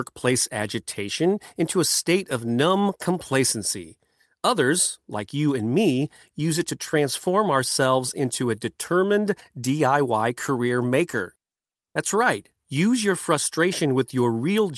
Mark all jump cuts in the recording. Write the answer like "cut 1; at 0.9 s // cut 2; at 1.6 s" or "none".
none